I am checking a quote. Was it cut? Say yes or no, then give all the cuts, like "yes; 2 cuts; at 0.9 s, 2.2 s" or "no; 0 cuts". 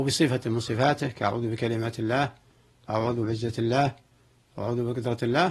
no; 0 cuts